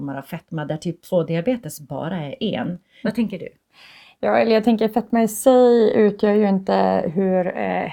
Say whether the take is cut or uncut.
cut